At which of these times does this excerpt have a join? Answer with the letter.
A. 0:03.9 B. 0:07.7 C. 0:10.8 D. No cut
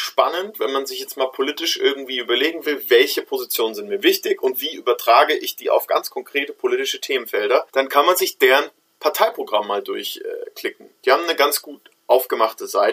B